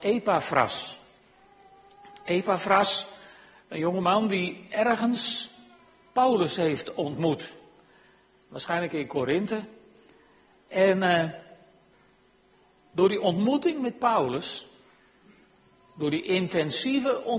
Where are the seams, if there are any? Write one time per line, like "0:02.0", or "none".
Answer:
none